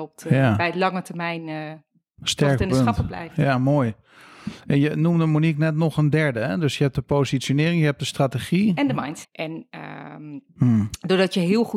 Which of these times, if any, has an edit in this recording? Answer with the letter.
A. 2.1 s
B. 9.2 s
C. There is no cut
B